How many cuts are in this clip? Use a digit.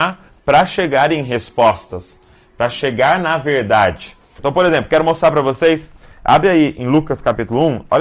1